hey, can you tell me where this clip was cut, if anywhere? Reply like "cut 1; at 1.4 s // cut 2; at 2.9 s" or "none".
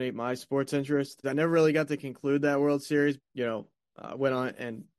cut 1; at 1.2 s // cut 2; at 3.2 s